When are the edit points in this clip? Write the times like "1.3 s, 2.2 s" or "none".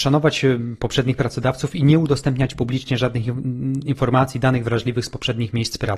none